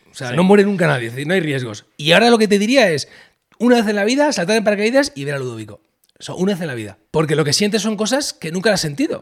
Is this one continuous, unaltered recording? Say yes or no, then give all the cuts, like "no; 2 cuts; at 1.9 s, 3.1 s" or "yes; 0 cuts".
no; 1 cut; at 7.1 s